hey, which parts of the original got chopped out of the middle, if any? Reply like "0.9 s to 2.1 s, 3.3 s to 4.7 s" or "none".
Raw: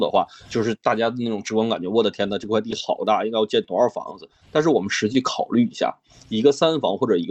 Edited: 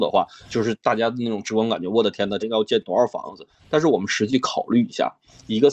2.4 s to 3.2 s